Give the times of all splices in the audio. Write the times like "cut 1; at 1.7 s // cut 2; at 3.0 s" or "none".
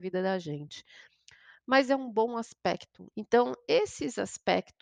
cut 1; at 3.1 s

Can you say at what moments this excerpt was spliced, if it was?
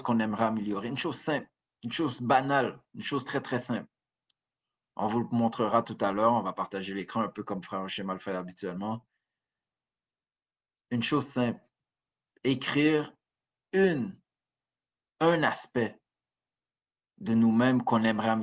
cut 1; at 3.3 s

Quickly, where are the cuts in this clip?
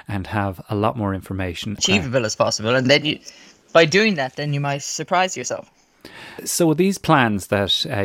cut 1; at 1.8 s

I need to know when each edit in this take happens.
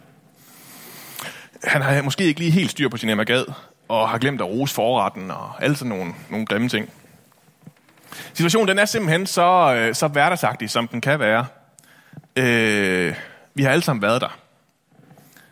cut 1; at 6.3 s

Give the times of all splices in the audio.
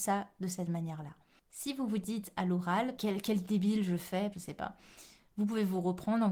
cut 1; at 3.0 s // cut 2; at 4.3 s

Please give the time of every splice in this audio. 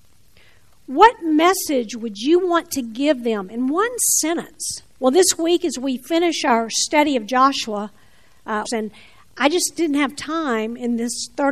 cut 1; at 5.0 s // cut 2; at 8.6 s

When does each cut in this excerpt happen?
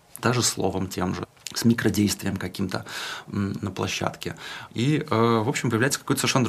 cut 1; at 4.7 s

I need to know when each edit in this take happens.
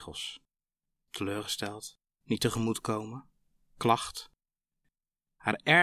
cut 1; at 2.2 s

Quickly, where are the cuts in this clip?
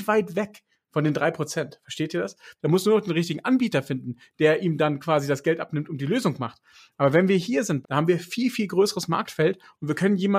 cut 1; at 2.6 s // cut 2; at 7.8 s

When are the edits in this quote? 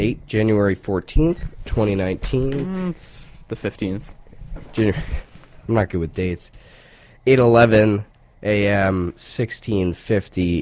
none

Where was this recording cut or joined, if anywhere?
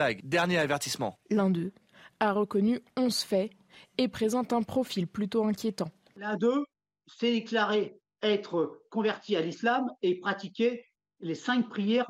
none

